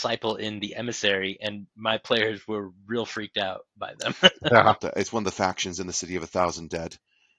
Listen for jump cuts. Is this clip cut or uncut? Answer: cut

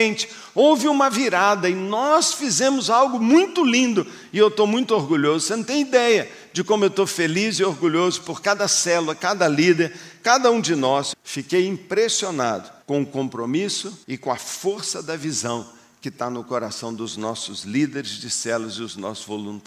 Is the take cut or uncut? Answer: cut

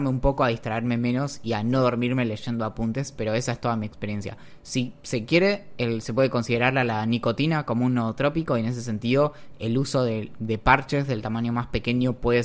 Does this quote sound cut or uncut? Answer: uncut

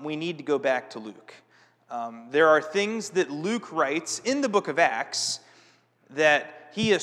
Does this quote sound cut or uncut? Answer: uncut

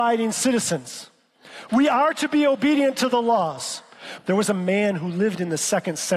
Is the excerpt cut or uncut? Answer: cut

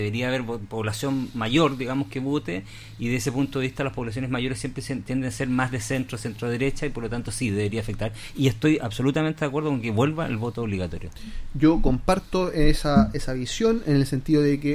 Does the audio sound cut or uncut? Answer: uncut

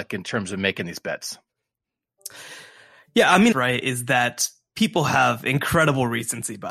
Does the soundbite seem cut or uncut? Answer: cut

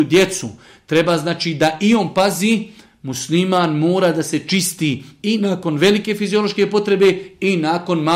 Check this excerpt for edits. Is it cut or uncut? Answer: uncut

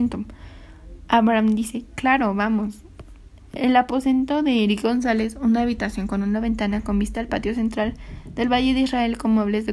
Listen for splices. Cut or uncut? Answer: uncut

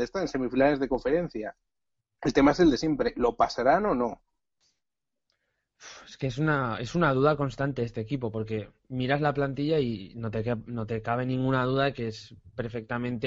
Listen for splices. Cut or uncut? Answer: uncut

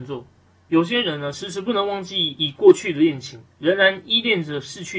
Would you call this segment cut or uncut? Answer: uncut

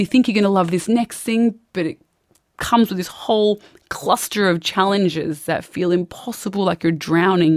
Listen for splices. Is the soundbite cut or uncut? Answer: uncut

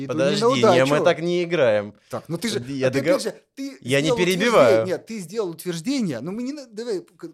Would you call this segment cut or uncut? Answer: uncut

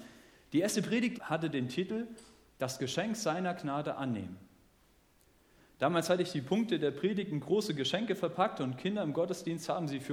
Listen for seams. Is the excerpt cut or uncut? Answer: cut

